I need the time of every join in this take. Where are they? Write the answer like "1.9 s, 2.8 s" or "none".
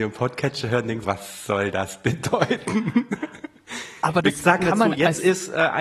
1.0 s